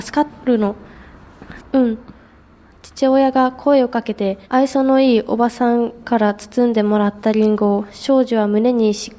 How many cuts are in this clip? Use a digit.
2